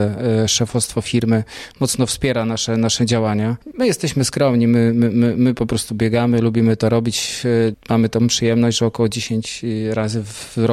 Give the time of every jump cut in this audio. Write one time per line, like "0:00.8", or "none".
0:03.7
0:07.7